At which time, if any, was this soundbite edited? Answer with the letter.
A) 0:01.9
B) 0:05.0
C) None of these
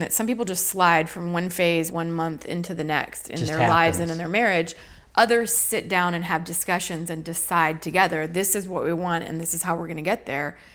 A